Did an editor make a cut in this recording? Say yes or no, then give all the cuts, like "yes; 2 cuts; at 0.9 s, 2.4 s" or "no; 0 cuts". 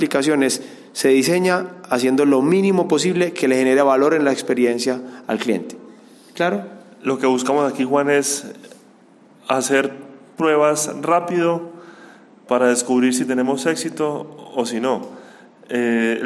no; 0 cuts